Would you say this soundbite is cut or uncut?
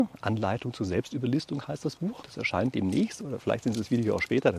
cut